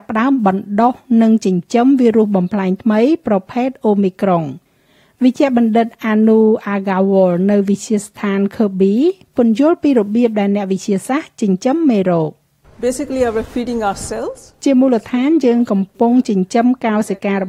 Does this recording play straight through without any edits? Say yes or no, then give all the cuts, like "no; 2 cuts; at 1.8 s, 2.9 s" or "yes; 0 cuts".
yes; 0 cuts